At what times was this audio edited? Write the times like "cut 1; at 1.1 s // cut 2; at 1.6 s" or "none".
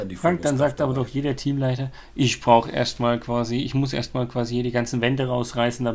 none

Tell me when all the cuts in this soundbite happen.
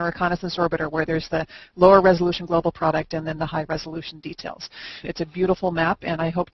cut 1; at 5.0 s

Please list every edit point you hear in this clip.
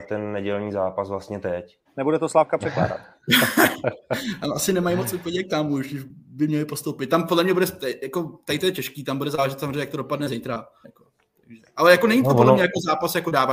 cut 1; at 1.9 s // cut 2; at 10.8 s

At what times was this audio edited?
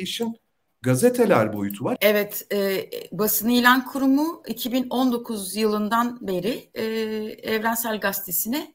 cut 1; at 2.0 s

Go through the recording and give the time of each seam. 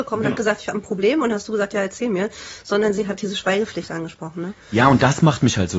none

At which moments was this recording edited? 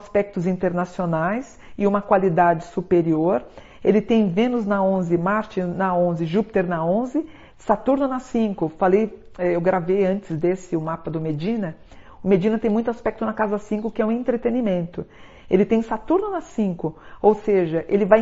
cut 1; at 7.5 s

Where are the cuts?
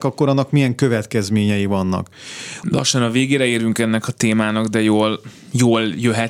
cut 1; at 2.6 s

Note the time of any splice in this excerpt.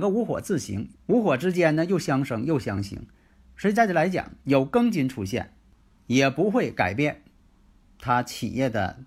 cut 1; at 0.9 s // cut 2; at 4.4 s

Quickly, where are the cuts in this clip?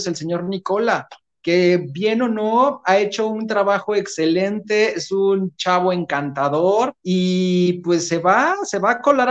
cut 1; at 7.0 s

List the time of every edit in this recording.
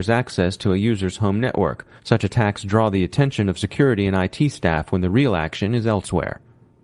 cut 1; at 2.0 s

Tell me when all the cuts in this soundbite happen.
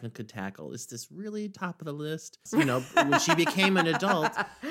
cut 1; at 2.5 s

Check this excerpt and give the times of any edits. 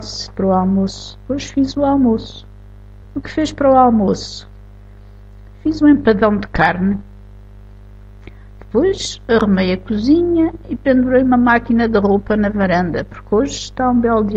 cut 1; at 3.0 s

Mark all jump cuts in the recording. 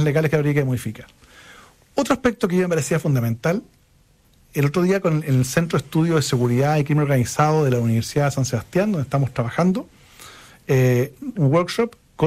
cut 1; at 11.4 s

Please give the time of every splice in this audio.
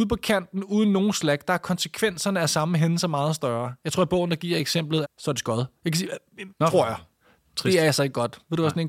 cut 1; at 5.0 s // cut 2; at 6.5 s

